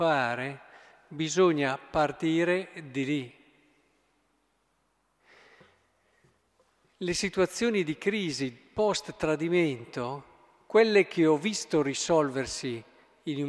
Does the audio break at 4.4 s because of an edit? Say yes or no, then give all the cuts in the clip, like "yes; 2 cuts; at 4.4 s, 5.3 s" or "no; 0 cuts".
no; 0 cuts